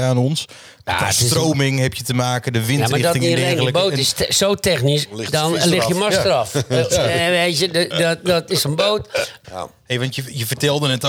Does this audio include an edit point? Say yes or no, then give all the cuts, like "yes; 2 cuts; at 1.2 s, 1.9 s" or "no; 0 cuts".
yes; 2 cuts; at 5.1 s, 9.4 s